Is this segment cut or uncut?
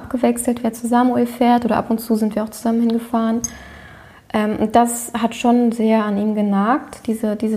uncut